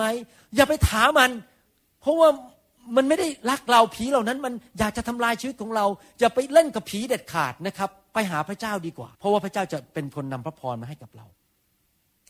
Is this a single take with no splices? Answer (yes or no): no